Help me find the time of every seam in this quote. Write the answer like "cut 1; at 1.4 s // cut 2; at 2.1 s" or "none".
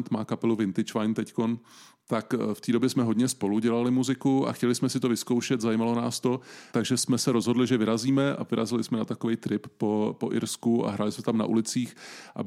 cut 1; at 6.7 s